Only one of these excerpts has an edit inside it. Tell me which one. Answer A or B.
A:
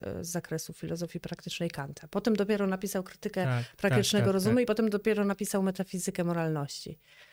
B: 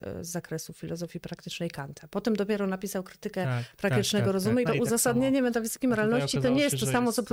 B